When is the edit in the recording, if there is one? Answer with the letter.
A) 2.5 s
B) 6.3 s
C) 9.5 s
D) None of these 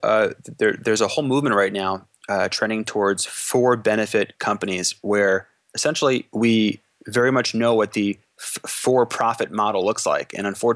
B